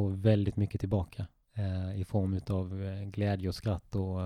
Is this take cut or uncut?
uncut